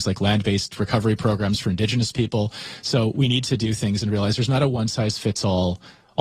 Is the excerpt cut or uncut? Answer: uncut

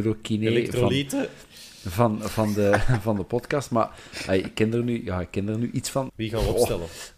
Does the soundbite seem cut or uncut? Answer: cut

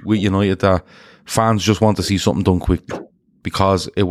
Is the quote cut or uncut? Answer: uncut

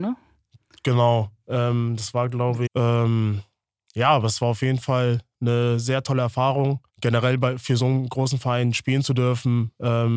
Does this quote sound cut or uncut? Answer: cut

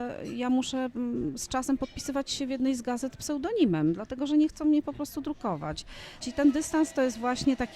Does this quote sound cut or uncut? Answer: cut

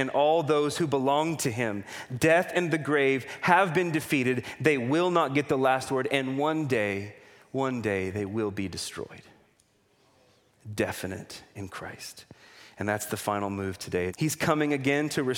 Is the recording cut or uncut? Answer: cut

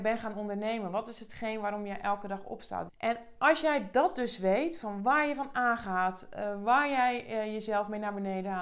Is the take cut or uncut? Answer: cut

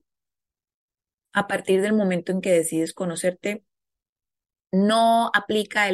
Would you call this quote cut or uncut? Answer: uncut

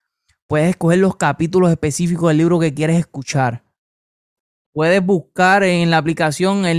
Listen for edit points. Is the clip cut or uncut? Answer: uncut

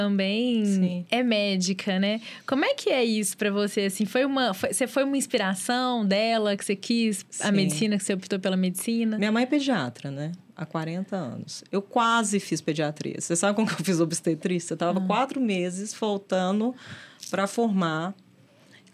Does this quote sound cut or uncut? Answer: uncut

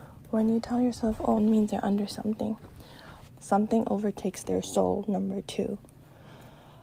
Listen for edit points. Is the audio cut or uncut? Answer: cut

